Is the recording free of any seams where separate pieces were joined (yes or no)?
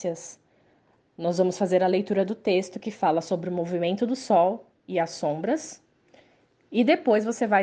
yes